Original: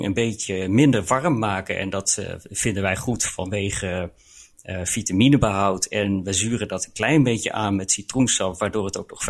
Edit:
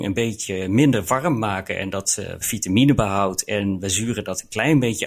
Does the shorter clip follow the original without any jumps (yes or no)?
no